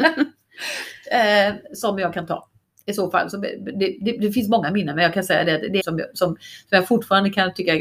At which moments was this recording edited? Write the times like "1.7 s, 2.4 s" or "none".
5.8 s

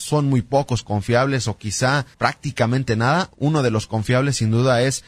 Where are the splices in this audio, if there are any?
2.1 s

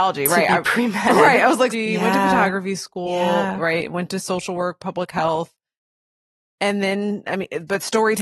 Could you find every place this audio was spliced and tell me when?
1.7 s

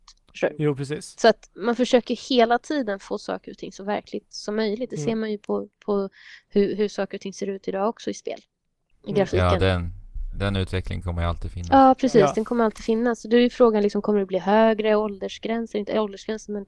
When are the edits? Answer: none

